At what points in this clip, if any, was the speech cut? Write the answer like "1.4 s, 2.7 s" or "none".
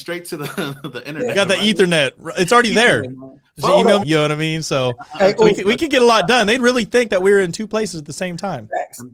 4.0 s